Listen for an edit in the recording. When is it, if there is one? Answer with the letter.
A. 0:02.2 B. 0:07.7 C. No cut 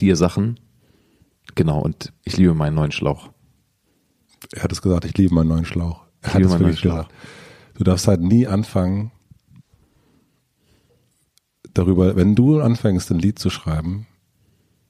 A